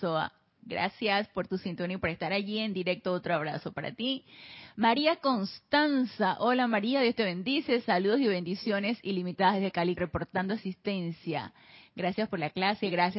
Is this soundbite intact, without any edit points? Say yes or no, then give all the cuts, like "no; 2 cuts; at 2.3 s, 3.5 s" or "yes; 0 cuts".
no; 1 cut; at 10.0 s